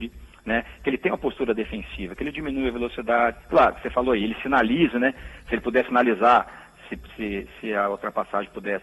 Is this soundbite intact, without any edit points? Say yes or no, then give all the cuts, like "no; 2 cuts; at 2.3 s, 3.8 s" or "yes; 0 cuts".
yes; 0 cuts